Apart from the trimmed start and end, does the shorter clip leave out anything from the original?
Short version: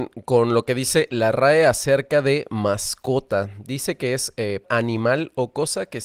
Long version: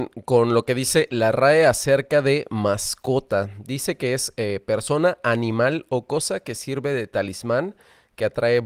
yes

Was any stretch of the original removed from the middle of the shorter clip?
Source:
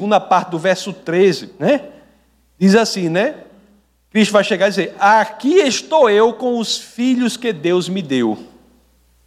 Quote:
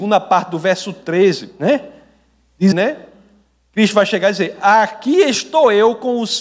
yes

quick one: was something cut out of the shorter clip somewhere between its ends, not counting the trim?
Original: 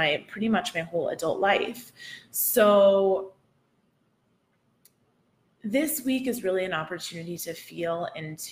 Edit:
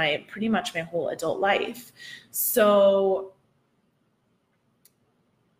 no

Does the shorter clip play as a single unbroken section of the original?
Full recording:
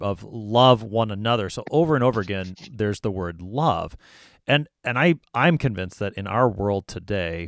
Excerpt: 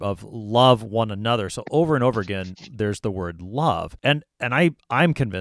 no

